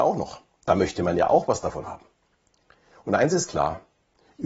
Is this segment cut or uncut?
uncut